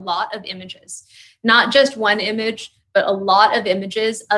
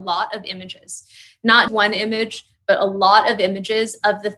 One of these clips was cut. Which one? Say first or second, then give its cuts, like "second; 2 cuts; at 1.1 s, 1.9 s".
second; 1 cut; at 1.7 s